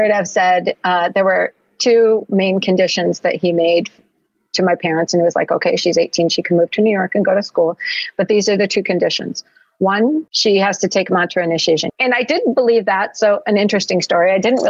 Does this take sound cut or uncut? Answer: cut